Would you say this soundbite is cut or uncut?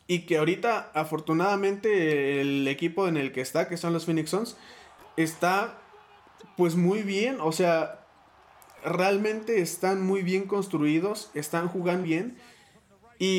cut